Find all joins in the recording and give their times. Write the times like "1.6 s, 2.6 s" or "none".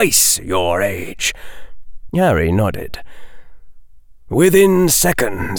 2.1 s